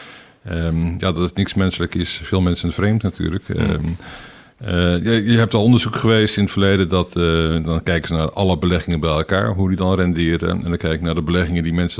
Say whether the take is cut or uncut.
uncut